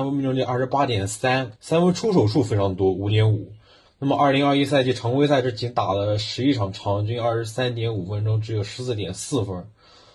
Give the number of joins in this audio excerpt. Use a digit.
2